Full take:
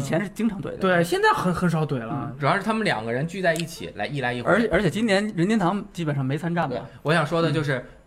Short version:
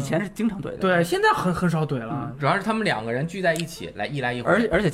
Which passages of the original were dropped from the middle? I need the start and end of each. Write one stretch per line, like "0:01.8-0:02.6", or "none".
none

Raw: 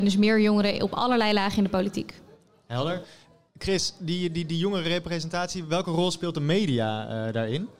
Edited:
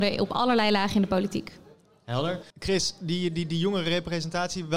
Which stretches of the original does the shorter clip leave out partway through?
0:03.1-0:03.5

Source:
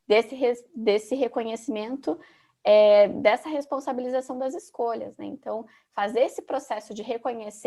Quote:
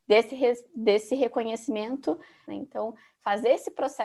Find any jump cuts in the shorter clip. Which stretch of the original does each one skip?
0:02.5-0:05.2

